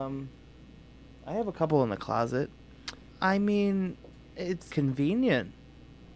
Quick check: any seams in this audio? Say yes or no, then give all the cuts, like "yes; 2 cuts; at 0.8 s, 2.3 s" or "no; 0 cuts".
yes; 2 cuts; at 3.1 s, 4.7 s